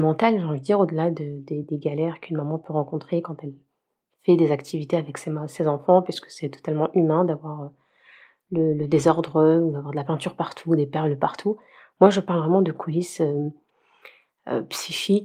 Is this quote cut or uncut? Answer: cut